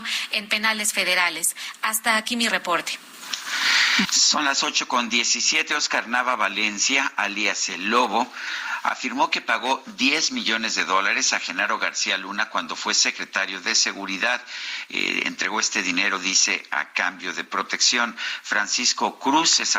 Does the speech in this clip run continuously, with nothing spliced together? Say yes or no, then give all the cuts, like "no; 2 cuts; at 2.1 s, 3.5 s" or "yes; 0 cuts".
no; 1 cut; at 4.0 s